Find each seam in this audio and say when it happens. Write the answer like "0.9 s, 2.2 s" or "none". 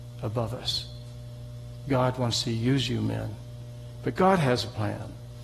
4.0 s